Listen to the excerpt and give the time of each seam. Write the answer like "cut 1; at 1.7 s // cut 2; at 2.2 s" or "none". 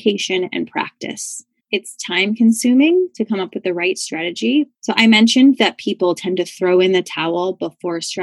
cut 1; at 1.6 s // cut 2; at 4.7 s

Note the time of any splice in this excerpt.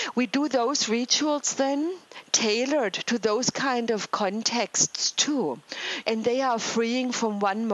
cut 1; at 6.0 s

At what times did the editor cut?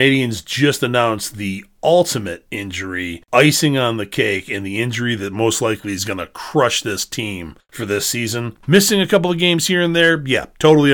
cut 1; at 8.6 s

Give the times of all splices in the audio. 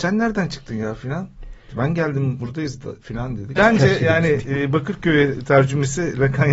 cut 1; at 3.6 s

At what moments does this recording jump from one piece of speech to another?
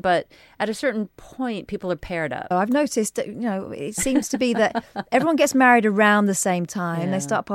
cut 1; at 2.5 s

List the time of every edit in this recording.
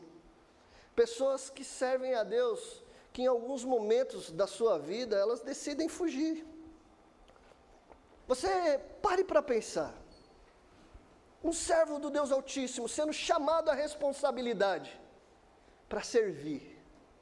cut 1; at 8.2 s

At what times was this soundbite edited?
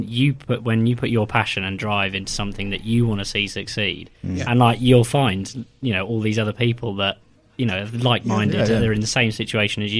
none

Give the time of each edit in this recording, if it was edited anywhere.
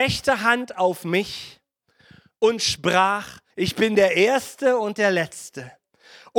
cut 1; at 3.5 s

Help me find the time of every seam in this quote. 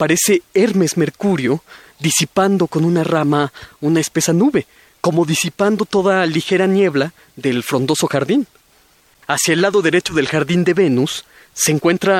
cut 1; at 9.2 s

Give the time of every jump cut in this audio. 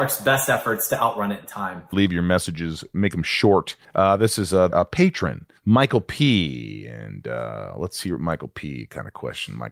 cut 1; at 1.9 s // cut 2; at 4.7 s

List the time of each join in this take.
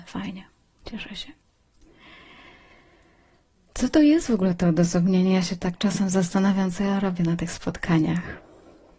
none

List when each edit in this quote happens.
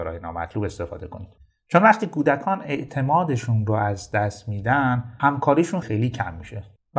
cut 1; at 5.8 s

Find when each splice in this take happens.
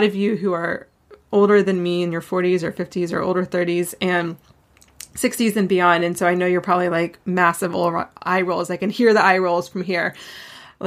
none

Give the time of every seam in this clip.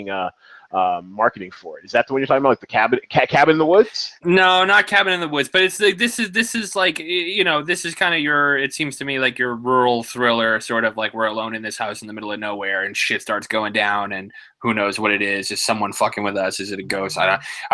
cut 1; at 4.2 s

